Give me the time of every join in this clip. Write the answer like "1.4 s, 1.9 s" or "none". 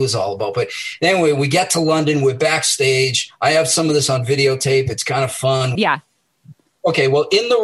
5.8 s